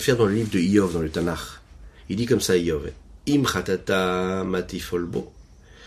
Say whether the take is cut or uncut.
uncut